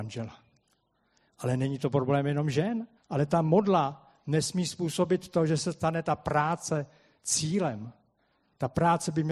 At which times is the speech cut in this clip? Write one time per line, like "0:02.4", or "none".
0:03.0